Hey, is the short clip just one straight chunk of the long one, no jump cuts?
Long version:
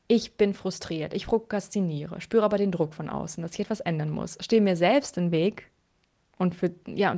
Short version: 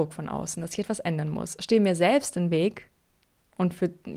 yes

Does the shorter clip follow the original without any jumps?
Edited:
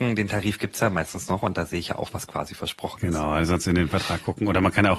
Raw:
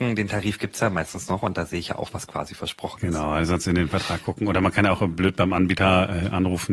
yes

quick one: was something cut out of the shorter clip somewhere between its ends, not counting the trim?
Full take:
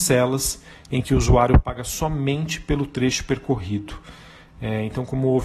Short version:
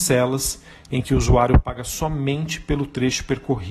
no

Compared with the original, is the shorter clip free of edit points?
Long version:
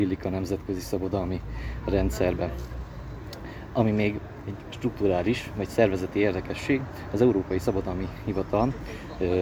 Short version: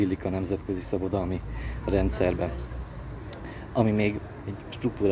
yes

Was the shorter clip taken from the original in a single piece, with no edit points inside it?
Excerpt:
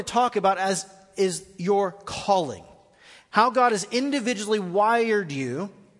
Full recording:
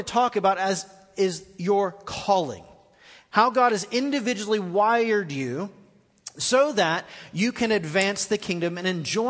yes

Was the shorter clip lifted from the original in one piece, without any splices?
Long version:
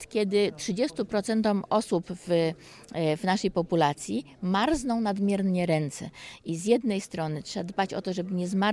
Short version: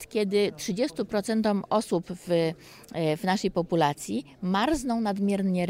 yes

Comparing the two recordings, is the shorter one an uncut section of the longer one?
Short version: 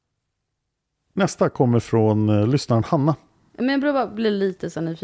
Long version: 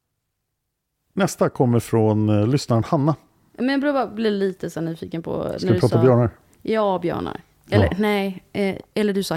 yes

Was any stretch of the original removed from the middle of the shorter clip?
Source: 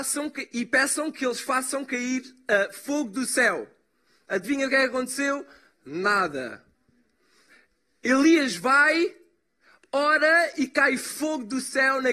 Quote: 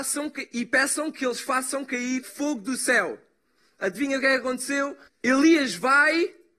yes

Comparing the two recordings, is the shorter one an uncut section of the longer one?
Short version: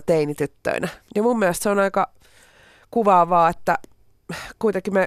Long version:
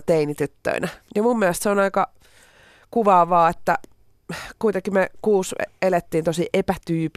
yes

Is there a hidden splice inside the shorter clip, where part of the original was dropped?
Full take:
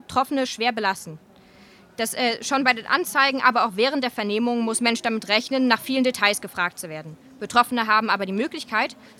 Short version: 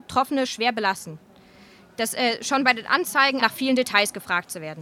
yes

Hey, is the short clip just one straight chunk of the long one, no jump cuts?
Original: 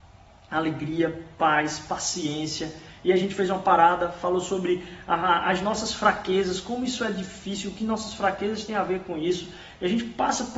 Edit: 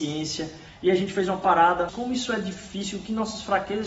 no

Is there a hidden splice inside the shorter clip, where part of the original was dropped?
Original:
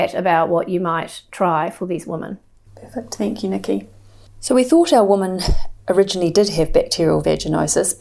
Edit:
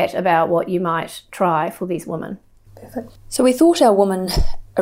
yes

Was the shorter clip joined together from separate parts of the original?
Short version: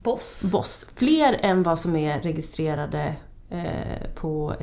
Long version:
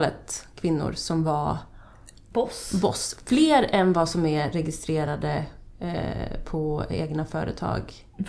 no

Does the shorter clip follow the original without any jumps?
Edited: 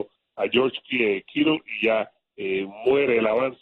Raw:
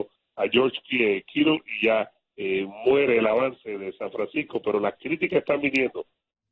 yes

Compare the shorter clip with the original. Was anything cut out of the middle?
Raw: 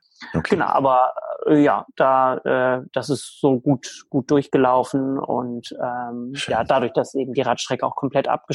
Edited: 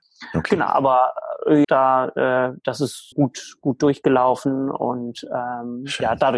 yes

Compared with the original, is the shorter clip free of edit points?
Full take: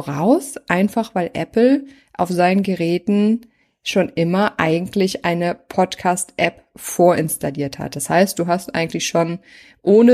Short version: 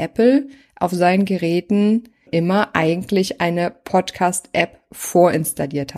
no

